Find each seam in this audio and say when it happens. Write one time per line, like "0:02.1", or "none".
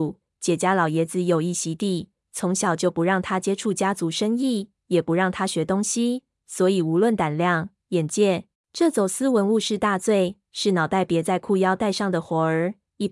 0:08.5
0:10.5